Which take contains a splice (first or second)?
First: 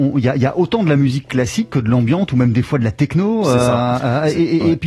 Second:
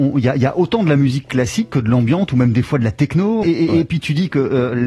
second